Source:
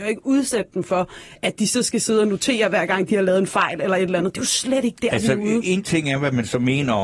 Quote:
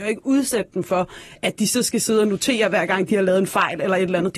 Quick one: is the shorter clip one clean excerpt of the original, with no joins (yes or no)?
yes